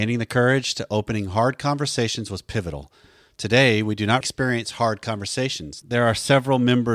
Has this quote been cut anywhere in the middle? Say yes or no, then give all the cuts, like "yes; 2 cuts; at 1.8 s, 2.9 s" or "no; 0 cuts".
yes; 2 cuts; at 4.2 s, 5.8 s